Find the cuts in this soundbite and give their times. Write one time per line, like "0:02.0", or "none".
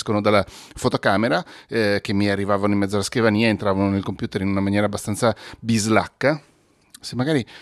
none